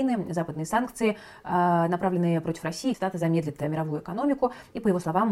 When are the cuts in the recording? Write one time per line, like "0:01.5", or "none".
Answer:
0:02.9